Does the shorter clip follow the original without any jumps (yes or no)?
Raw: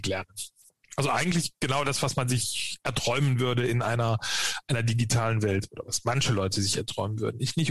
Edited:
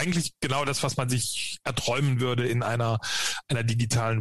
yes